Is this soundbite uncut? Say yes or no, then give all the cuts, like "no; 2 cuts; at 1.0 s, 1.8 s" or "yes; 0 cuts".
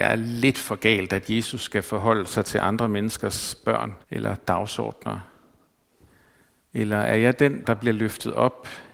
no; 2 cuts; at 4.0 s, 7.6 s